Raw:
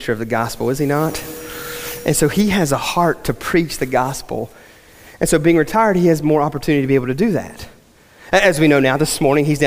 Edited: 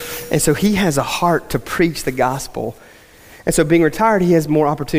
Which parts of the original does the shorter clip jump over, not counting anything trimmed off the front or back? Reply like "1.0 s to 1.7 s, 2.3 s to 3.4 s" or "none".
none